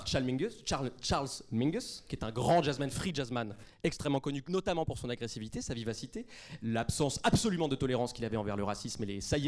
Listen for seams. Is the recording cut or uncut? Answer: uncut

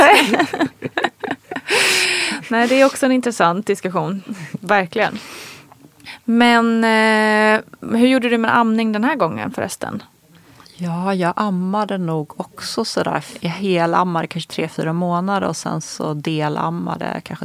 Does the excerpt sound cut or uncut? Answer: uncut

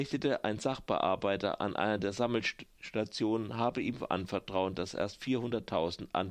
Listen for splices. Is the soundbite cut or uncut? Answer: uncut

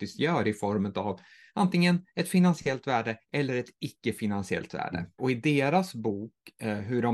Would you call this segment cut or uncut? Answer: cut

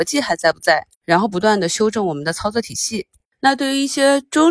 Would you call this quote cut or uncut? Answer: uncut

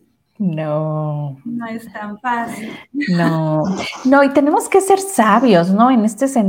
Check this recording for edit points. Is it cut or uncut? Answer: uncut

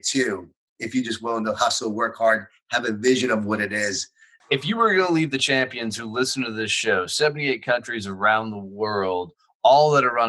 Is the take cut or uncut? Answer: cut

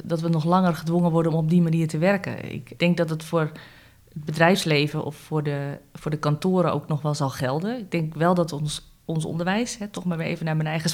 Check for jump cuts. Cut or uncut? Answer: cut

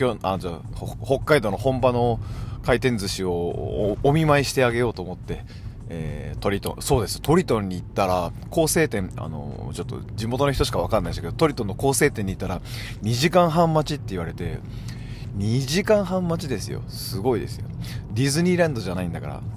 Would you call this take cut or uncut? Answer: uncut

